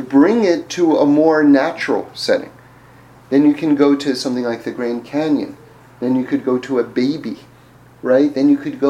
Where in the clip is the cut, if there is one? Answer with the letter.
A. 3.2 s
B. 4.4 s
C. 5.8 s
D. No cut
D